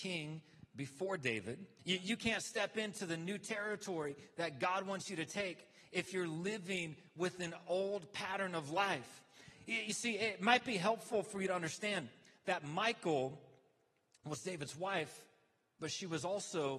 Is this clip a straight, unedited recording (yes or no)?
no